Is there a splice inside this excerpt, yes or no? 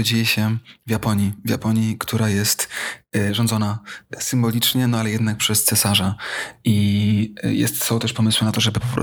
no